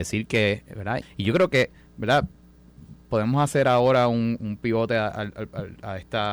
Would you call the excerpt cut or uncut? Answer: cut